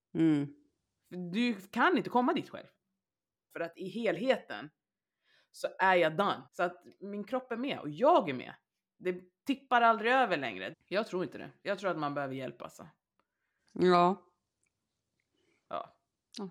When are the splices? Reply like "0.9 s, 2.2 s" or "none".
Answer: 3.5 s, 6.5 s, 10.7 s